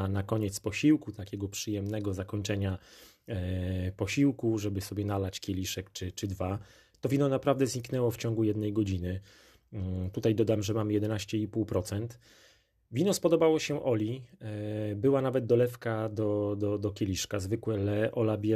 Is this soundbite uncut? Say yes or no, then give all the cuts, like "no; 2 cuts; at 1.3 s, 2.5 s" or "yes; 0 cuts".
yes; 0 cuts